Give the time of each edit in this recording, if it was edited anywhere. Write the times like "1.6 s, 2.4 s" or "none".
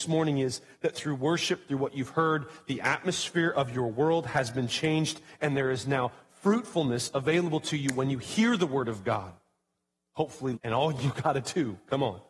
10.6 s